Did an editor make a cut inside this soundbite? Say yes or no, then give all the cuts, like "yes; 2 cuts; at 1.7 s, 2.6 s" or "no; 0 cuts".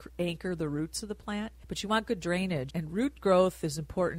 yes; 2 cuts; at 1.6 s, 2.7 s